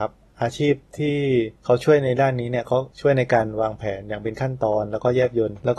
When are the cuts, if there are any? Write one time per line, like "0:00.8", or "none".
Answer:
0:01.6
0:02.9